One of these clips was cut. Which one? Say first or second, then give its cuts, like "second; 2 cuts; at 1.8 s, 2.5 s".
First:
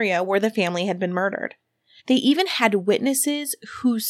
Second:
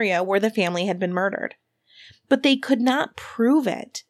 first; 1 cut; at 2.0 s